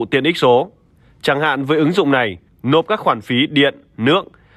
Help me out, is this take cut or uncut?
cut